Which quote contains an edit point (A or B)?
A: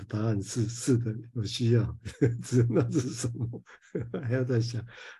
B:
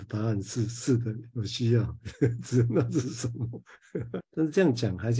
B